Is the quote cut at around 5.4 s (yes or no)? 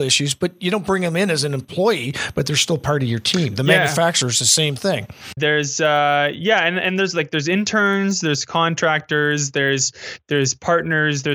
yes